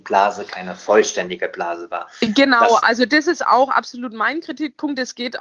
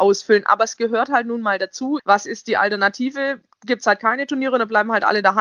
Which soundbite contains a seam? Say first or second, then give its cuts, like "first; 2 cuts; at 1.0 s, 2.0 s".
second; 1 cut; at 2.0 s